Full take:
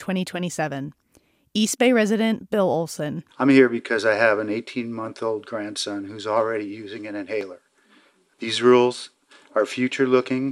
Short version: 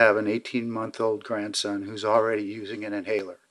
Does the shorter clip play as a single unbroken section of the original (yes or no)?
yes